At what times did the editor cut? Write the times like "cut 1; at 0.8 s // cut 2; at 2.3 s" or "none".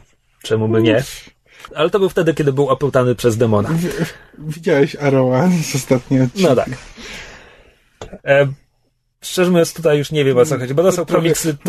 cut 1; at 1.7 s // cut 2; at 8.2 s